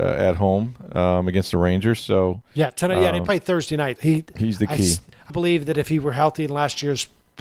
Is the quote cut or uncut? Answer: cut